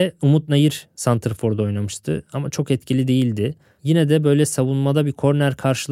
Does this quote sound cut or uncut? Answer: uncut